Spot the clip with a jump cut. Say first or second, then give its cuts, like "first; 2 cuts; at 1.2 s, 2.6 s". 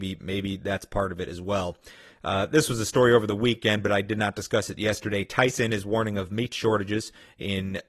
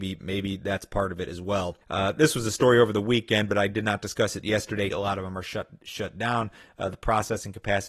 second; 2 cuts; at 1.8 s, 4.9 s